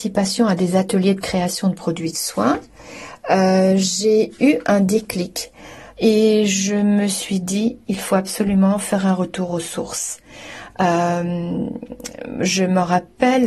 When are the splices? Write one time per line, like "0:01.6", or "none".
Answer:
0:05.9